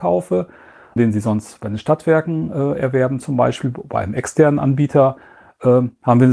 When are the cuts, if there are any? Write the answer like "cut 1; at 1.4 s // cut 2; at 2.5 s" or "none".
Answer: cut 1; at 1.0 s